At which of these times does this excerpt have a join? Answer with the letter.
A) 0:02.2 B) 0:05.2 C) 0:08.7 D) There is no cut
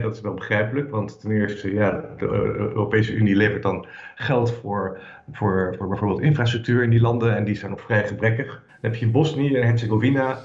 C